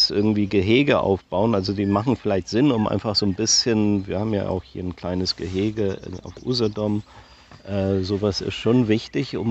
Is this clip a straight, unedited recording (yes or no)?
yes